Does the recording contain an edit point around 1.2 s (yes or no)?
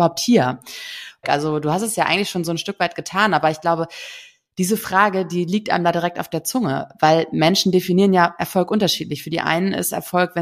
yes